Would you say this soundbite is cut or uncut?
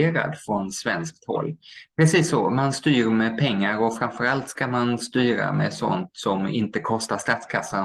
cut